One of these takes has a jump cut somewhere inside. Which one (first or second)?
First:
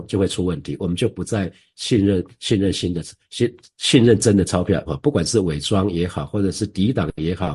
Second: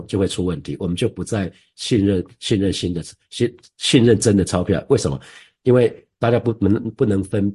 first